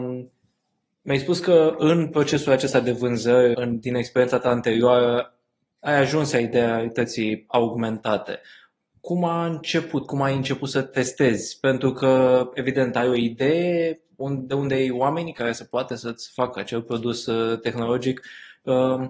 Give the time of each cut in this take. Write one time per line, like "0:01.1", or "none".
0:03.5